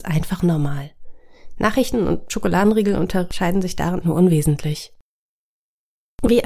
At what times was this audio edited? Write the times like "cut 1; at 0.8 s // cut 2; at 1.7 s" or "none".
cut 1; at 4.0 s